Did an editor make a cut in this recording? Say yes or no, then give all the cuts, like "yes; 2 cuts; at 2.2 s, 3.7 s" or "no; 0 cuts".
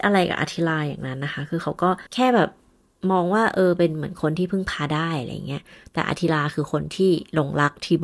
yes; 1 cut; at 2.1 s